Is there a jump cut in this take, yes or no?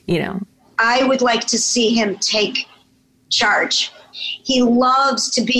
no